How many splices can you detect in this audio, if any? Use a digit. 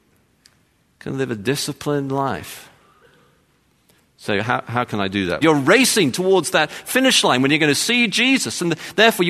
1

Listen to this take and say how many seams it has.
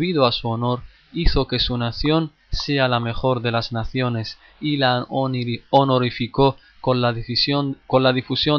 0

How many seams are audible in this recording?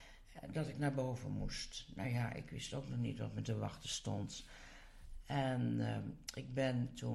0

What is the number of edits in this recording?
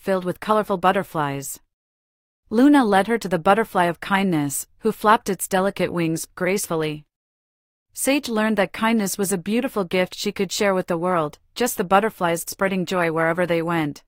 1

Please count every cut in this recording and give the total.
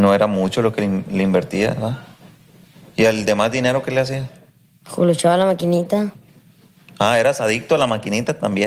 0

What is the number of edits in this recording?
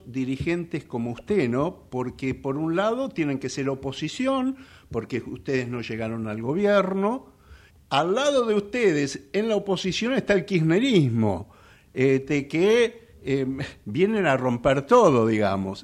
1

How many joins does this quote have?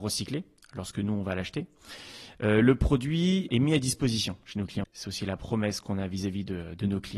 1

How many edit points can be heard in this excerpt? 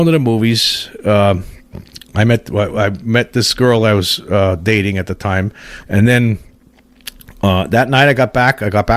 1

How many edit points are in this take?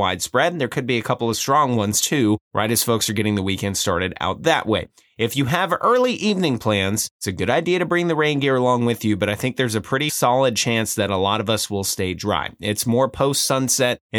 0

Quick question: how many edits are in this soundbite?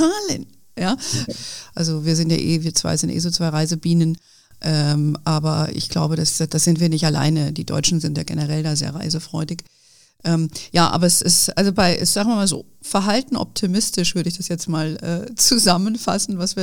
1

